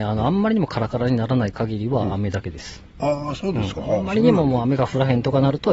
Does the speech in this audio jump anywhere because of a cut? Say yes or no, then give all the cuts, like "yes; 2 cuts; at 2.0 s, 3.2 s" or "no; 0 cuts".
no; 0 cuts